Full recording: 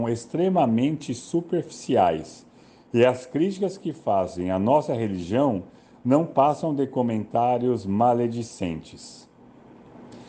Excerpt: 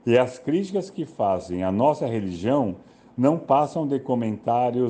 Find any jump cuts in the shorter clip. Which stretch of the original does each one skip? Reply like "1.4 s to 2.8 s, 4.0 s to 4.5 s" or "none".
none